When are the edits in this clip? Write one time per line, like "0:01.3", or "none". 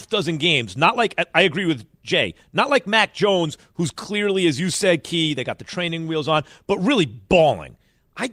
none